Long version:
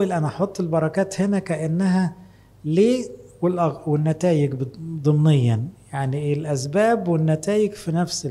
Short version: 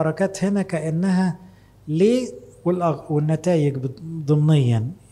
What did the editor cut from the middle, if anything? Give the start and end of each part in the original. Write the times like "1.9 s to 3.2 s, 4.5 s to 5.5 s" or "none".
none